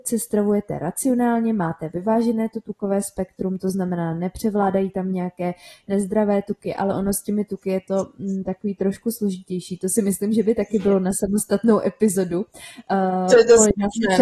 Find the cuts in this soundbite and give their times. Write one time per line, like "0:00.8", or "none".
none